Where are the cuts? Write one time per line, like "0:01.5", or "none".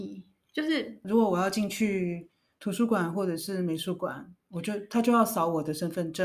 0:01.0